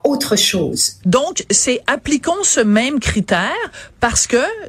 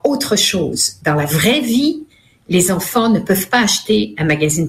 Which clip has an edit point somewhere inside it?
first; 1 cut; at 1.0 s

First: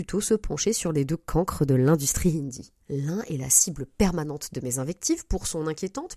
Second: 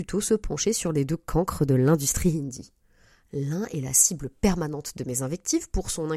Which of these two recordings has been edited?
first; 1 cut; at 2.8 s

